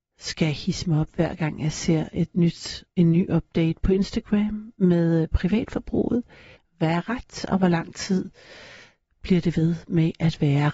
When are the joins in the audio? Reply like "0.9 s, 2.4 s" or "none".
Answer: 6.6 s